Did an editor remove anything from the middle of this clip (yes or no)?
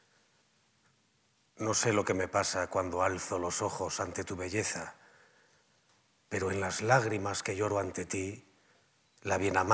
no